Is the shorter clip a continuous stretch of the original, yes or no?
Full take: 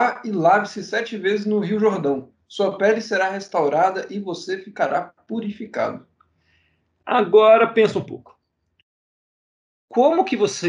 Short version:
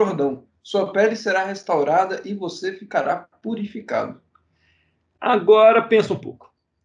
yes